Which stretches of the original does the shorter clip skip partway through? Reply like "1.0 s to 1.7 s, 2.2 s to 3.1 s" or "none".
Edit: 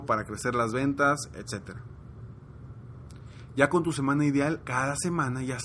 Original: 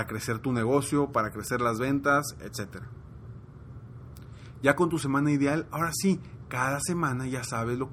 5.7 s to 6.4 s